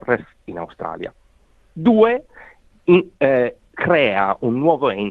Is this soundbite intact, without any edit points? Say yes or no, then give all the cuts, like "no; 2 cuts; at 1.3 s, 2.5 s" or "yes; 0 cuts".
yes; 0 cuts